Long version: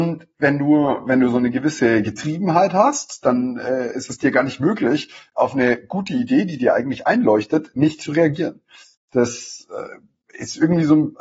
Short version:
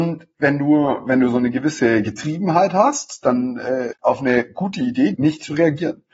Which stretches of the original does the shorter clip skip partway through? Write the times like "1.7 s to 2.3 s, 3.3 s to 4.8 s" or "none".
3.9 s to 5.3 s, 6.5 s to 7.7 s